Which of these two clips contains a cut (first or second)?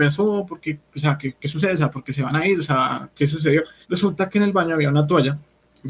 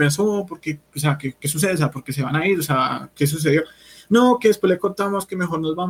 first